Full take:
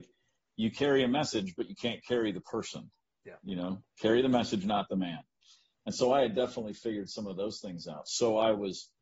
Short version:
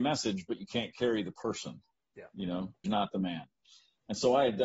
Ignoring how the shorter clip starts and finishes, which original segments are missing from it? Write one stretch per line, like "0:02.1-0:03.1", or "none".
0:03.9-0:04.6